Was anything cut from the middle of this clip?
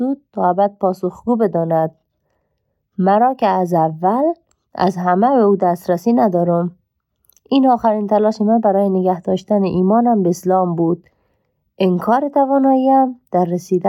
no; 0 cuts

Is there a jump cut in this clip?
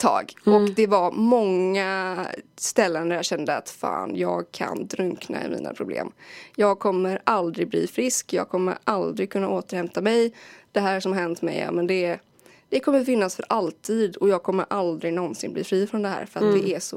no; 0 cuts

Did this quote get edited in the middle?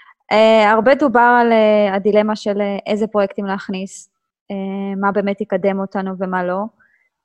no; 0 cuts

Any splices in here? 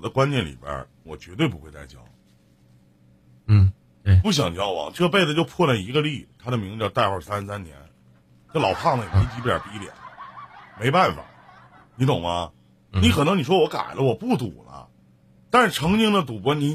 yes; 2 cuts; at 1.0 s, 12.9 s

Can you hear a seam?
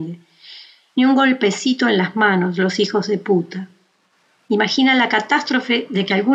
no; 0 cuts

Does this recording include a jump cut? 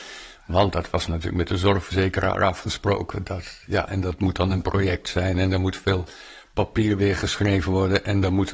yes; 1 cut; at 3.9 s

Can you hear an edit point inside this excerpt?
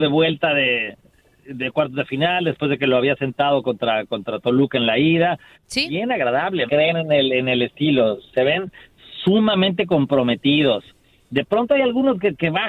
yes; 2 cuts; at 5.5 s, 6.7 s

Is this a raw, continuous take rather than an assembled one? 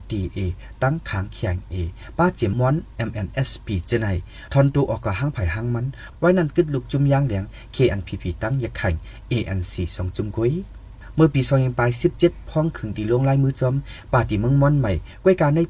no; 1 cut; at 2.5 s

